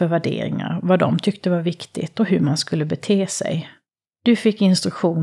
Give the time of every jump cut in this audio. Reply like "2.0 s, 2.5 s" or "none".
4.0 s